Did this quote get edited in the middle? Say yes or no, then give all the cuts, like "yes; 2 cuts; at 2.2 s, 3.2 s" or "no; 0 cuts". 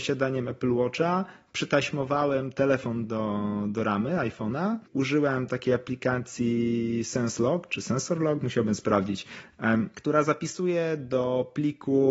no; 0 cuts